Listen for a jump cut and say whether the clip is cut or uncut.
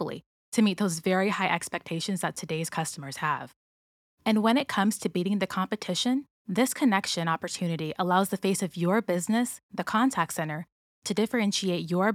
cut